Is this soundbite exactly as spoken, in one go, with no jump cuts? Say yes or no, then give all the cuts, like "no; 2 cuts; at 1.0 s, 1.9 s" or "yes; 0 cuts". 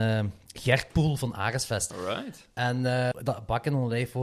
no; 2 cuts; at 1.9 s, 3.1 s